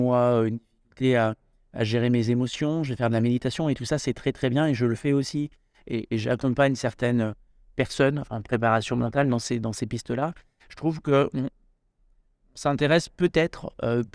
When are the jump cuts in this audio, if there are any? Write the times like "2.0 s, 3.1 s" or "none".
none